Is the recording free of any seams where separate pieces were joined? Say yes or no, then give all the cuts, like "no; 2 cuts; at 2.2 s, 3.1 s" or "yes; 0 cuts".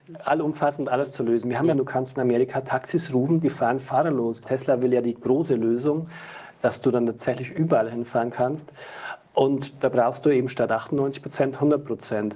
no; 2 cuts; at 1.7 s, 4.4 s